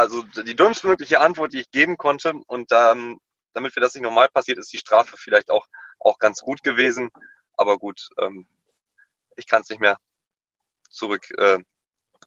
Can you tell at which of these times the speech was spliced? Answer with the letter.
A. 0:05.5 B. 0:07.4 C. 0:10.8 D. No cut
B